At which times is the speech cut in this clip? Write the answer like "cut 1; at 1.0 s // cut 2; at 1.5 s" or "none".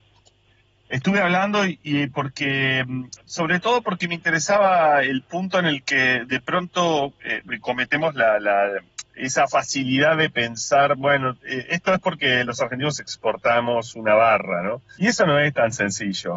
cut 1; at 15.0 s